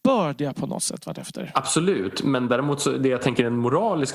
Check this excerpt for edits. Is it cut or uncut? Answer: uncut